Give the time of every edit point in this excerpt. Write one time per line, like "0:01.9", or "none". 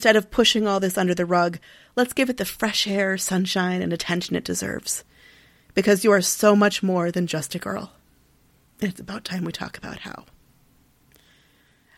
none